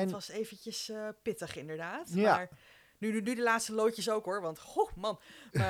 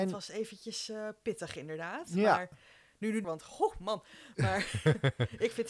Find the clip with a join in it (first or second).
second